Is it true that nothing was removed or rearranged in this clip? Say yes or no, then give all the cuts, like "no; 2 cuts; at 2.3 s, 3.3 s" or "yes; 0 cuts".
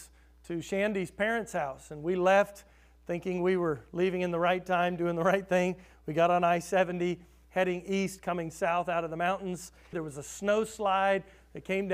no; 1 cut; at 9.9 s